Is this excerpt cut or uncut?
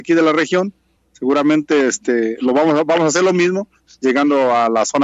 uncut